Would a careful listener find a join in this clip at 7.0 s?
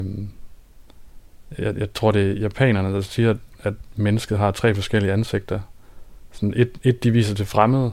no; 0 cuts

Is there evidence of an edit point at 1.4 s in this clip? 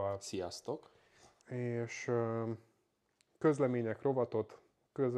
yes; 1 cut; at 1.4 s

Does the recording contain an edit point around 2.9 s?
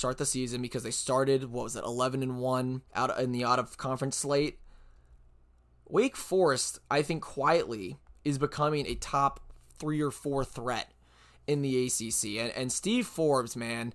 yes; 1 cut; at 2.9 s

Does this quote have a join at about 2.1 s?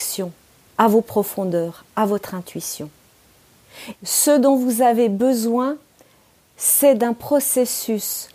no; 1 cut; at 4.0 s

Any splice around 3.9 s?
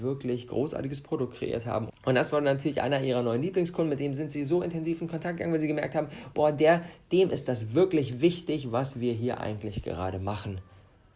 no; 1 cut; at 1.9 s

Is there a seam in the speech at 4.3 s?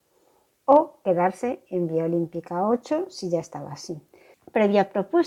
yes; 1 cut; at 4.3 s

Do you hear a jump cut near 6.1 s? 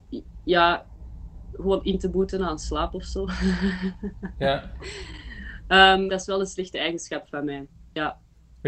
yes; 1 cut; at 6.1 s

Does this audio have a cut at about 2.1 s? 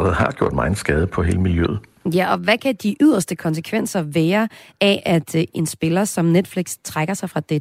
no; 0 cuts

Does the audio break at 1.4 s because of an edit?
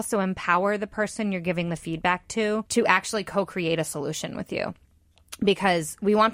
no; 1 cut; at 2.7 s

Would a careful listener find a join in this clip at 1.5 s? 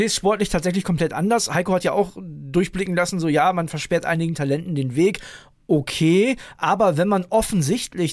no; 0 cuts

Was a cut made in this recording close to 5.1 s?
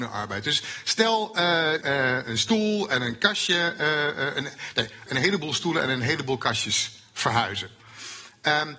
yes; 2 cuts; at 1.8 s, 5.1 s

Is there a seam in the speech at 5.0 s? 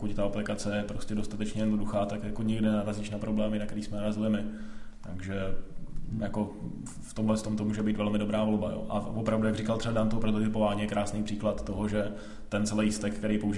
no; 0 cuts

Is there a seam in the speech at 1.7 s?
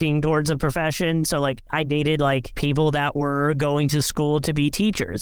yes; 1 cut; at 1.7 s

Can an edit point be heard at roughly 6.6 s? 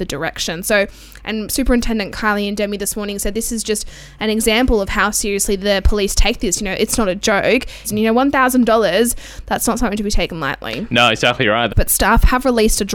no; 2 cuts; at 7.8 s, 11.7 s

